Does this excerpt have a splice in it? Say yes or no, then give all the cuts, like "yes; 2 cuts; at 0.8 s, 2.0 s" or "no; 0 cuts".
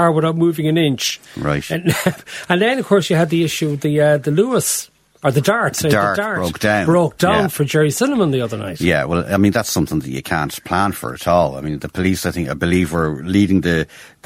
no; 0 cuts